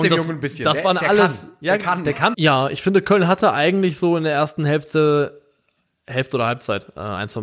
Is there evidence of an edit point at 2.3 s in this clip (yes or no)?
yes